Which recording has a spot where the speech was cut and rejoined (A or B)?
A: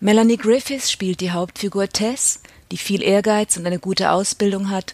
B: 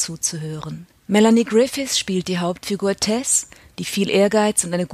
B